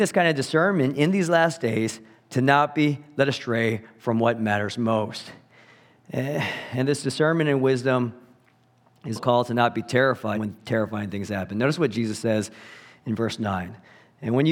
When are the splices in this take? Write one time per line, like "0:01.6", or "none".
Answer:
0:09.2
0:10.3